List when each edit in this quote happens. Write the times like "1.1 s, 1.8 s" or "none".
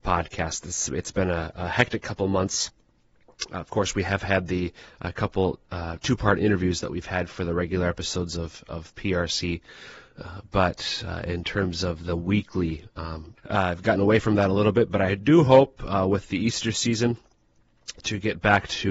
13.4 s